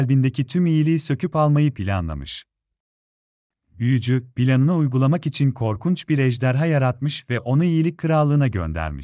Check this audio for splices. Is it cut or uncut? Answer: uncut